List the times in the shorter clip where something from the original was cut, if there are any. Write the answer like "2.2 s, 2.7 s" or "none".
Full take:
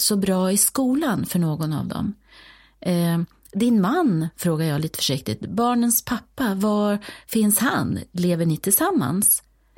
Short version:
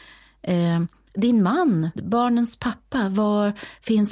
1.9 s